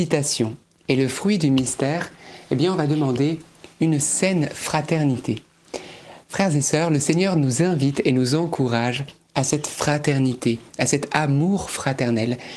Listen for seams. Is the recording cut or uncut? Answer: uncut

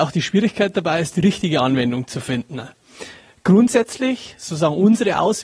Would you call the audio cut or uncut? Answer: uncut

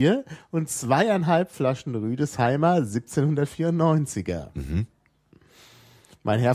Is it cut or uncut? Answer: uncut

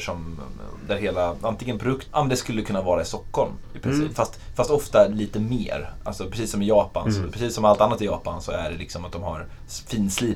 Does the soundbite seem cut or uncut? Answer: cut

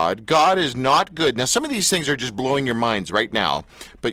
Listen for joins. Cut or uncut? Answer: uncut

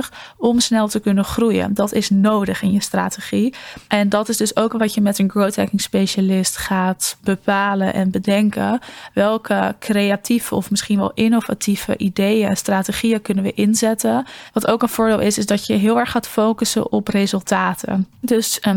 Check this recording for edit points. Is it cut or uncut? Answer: cut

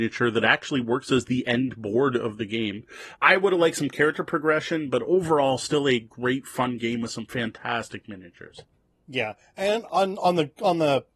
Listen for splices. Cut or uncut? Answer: cut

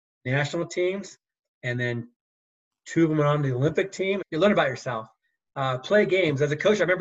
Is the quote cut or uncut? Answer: cut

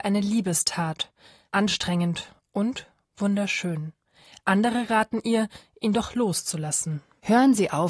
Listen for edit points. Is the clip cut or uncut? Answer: uncut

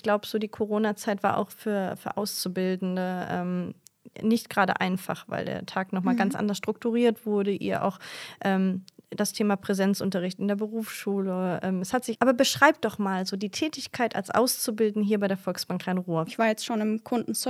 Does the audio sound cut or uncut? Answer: cut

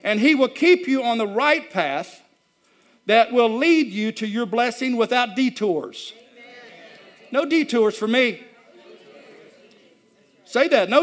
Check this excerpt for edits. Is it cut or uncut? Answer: uncut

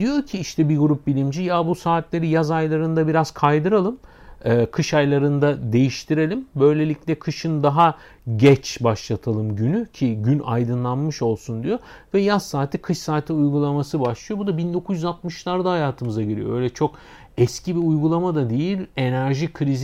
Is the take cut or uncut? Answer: uncut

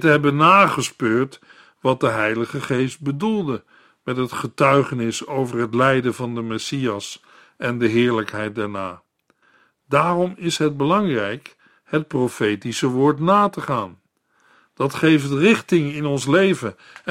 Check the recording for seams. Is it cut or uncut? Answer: uncut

